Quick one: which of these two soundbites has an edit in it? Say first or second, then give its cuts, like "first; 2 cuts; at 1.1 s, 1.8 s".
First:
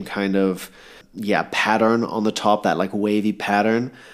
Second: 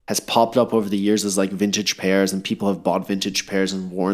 first; 1 cut; at 1.0 s